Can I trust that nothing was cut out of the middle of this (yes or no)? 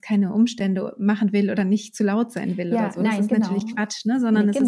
yes